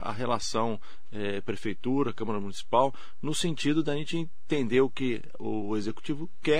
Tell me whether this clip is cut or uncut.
uncut